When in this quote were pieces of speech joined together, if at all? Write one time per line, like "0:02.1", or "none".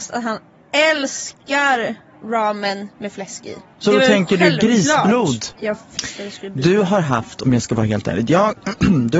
0:05.6